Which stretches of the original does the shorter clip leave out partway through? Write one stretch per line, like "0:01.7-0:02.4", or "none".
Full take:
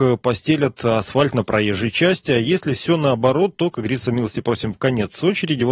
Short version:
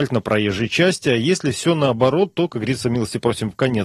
none